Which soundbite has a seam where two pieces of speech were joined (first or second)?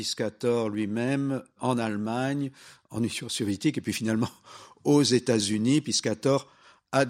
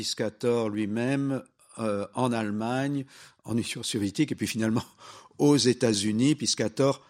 first